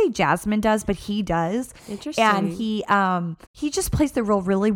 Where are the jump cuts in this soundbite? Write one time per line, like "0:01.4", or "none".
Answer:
0:03.4